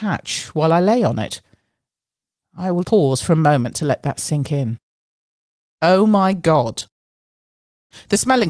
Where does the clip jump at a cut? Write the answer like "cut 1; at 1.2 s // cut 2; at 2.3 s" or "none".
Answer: cut 1; at 2.8 s